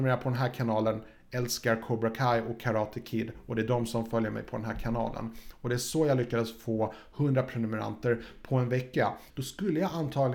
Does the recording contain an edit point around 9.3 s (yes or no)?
yes